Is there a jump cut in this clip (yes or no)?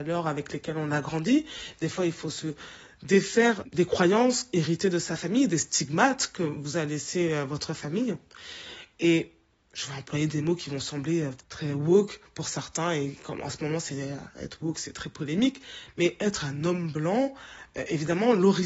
yes